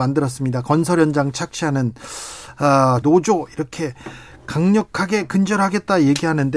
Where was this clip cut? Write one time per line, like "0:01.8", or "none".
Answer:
0:03.0